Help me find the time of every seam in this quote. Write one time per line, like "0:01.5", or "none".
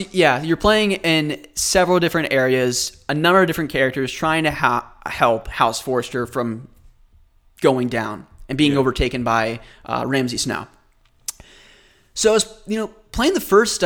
none